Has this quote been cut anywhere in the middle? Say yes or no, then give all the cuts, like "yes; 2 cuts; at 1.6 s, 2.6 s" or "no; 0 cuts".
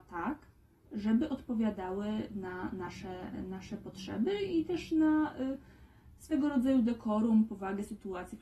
no; 0 cuts